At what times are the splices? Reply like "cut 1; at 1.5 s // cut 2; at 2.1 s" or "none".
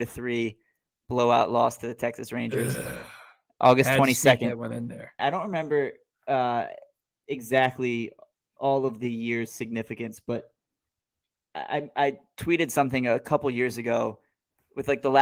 cut 1; at 5.2 s